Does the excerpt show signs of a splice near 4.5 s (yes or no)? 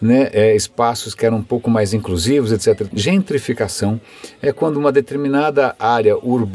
no